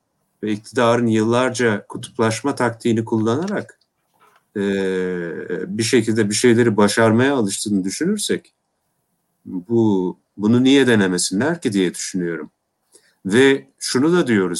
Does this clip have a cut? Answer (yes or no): no